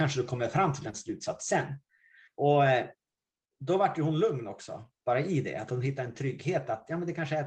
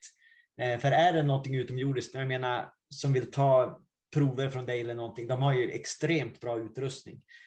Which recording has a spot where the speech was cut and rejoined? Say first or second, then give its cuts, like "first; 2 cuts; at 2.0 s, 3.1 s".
first; 1 cut; at 2.3 s